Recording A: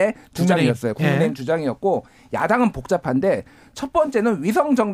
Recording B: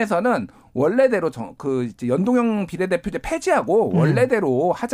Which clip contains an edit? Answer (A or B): B